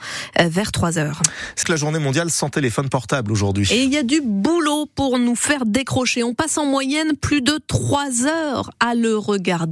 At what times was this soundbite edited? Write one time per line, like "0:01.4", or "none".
0:01.6